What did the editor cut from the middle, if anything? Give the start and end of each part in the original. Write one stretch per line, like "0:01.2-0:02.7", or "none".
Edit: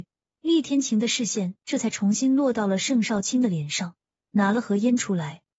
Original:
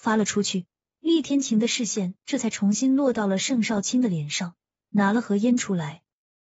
none

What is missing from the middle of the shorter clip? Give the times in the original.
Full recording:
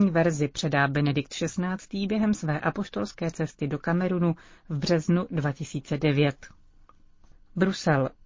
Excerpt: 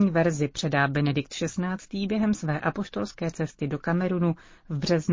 none

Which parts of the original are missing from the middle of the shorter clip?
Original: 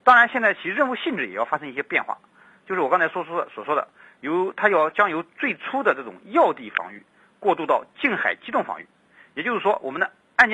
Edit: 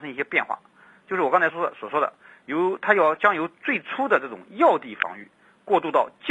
0:03.1-0:03.2

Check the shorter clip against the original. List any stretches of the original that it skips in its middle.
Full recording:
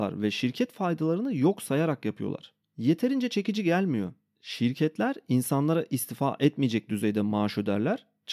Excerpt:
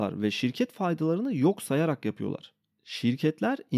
0:02.7-0:04.3

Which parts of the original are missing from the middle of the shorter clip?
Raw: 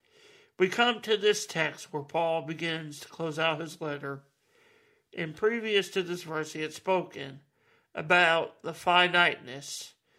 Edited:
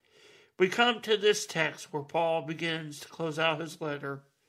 none

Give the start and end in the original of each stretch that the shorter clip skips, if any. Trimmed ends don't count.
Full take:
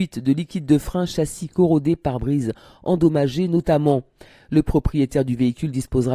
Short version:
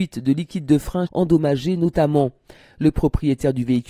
0:01.1-0:02.8

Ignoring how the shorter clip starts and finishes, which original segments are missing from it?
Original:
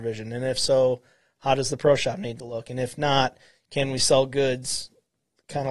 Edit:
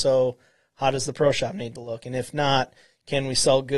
none

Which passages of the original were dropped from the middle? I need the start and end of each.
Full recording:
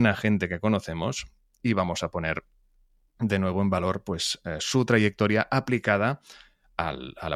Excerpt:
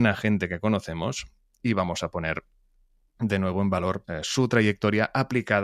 0:04.0-0:04.4

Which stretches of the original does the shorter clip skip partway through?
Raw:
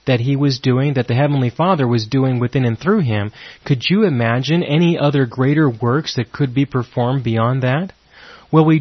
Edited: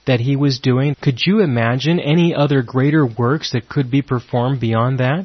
0:00.9-0:03.6

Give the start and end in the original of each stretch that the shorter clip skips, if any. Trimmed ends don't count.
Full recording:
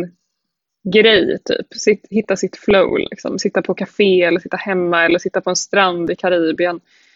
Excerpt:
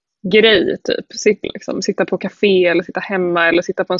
0:02.0-0:03.0

